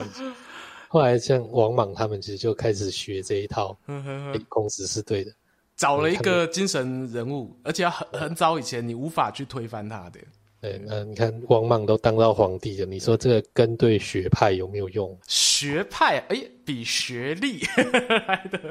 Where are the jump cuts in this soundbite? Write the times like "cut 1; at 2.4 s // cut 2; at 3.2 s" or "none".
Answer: cut 1; at 15.2 s